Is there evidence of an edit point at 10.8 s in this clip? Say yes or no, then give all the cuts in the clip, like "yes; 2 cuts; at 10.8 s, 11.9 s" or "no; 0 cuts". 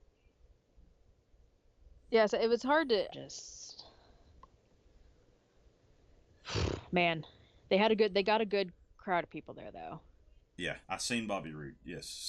yes; 2 cuts; at 3.1 s, 10.8 s